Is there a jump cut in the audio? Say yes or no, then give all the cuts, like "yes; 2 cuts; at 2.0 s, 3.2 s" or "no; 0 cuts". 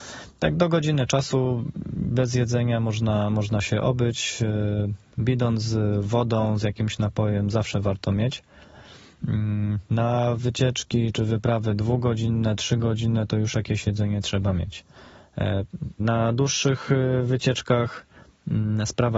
yes; 2 cuts; at 11.1 s, 16.0 s